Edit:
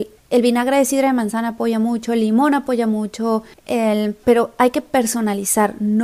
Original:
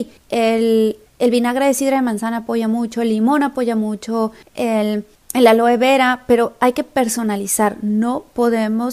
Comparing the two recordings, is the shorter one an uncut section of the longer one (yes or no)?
no